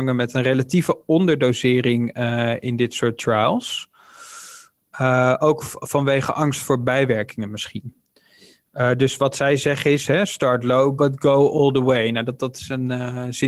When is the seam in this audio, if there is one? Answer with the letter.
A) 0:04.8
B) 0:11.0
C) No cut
B